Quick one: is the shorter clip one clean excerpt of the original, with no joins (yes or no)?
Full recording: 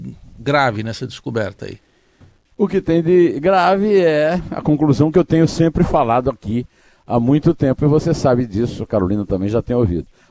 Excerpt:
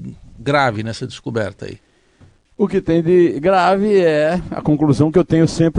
yes